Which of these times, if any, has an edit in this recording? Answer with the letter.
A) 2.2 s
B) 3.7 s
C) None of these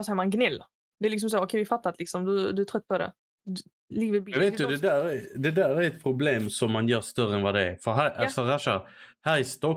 C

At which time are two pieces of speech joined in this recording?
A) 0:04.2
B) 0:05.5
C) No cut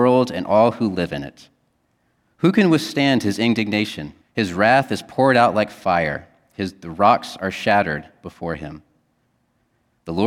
A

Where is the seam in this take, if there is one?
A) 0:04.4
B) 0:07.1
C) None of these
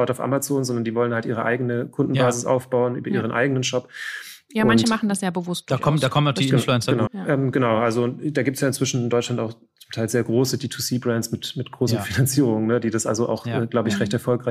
B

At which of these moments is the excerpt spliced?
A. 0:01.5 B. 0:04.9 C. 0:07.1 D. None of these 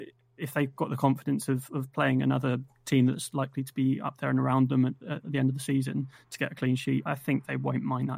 C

